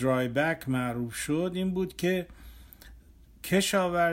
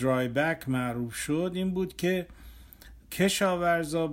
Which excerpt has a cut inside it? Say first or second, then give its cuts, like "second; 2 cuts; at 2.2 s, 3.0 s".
second; 1 cut; at 3.0 s